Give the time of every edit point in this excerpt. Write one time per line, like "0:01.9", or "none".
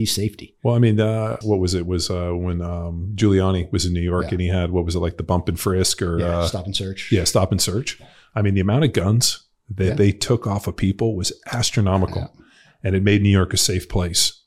0:01.4